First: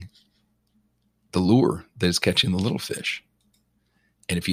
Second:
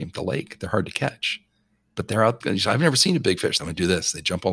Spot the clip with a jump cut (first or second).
second